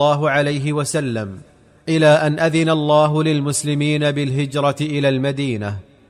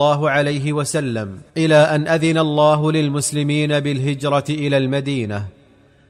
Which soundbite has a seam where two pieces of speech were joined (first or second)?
second